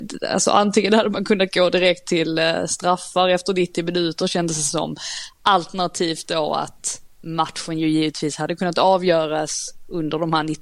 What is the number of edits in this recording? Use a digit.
0